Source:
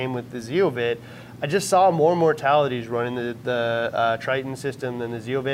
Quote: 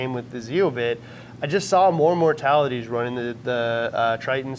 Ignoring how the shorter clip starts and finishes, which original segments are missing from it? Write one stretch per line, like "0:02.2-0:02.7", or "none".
none

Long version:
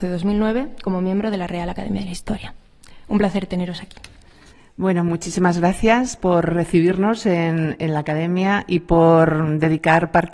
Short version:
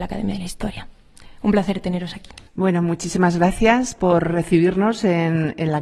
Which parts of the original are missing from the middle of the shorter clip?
0:04.1-0:04.7

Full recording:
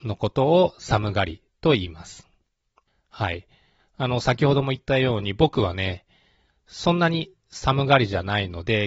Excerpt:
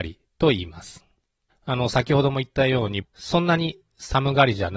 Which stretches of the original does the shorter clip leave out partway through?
0:02.7-0:03.8
0:05.3-0:06.5

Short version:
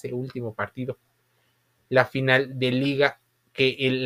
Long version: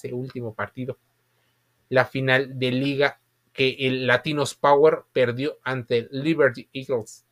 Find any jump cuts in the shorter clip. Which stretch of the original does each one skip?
none

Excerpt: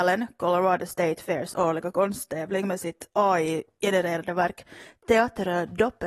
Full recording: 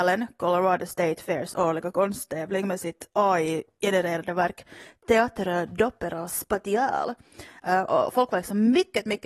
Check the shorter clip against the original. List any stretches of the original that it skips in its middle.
none

